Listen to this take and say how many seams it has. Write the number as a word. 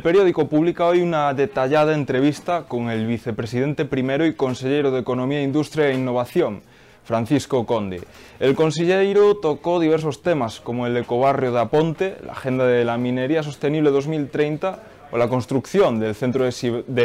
zero